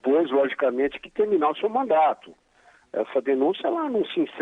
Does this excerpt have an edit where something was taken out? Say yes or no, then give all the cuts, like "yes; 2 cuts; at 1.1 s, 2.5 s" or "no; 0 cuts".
no; 0 cuts